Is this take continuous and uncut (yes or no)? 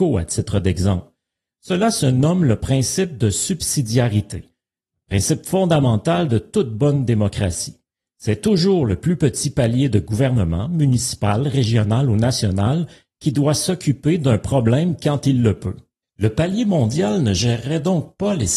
yes